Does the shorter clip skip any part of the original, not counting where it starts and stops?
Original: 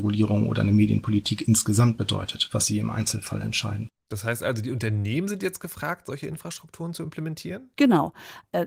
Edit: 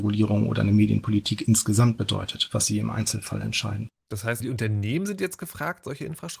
yes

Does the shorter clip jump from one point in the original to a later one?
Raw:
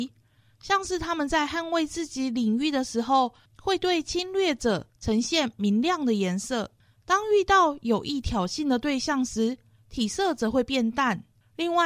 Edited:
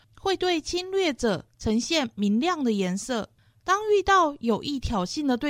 no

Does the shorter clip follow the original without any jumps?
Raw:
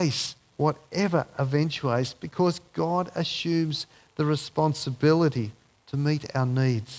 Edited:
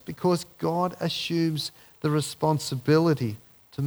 yes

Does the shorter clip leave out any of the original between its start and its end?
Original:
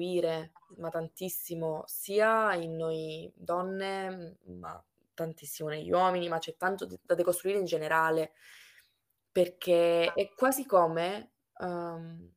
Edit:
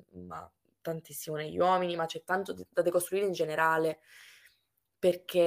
no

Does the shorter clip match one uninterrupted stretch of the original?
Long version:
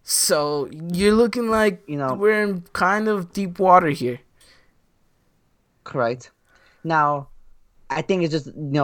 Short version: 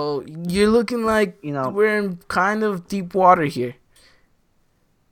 yes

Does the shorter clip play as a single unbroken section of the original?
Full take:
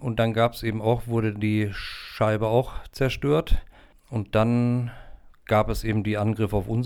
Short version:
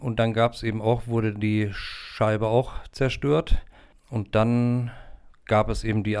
yes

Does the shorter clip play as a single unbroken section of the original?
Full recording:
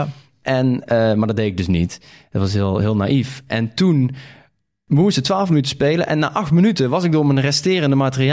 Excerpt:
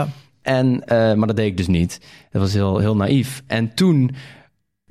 yes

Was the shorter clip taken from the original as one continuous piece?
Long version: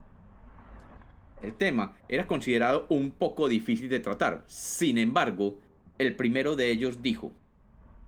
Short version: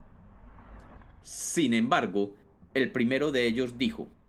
no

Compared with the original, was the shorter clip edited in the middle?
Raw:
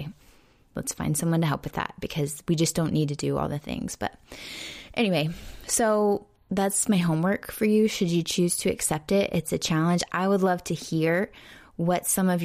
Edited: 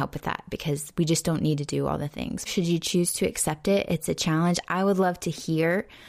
yes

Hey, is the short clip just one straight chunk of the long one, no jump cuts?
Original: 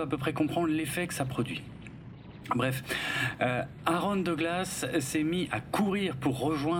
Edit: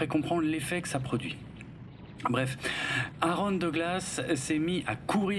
no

